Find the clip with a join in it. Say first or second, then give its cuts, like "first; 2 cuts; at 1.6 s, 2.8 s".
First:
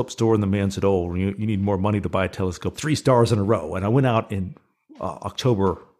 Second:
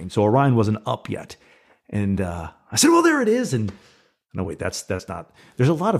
first; 1 cut; at 2.7 s